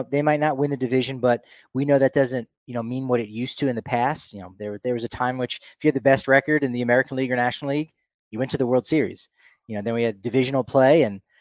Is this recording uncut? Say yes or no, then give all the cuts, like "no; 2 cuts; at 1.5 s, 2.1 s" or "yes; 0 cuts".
yes; 0 cuts